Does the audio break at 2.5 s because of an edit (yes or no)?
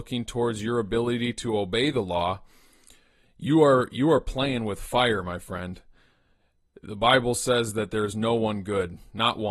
no